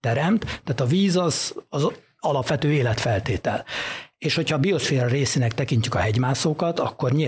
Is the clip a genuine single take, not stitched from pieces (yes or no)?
yes